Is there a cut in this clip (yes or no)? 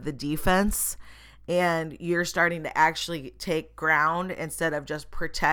no